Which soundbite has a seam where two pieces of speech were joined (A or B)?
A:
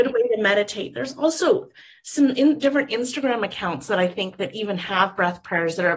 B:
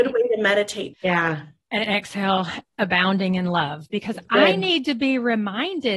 B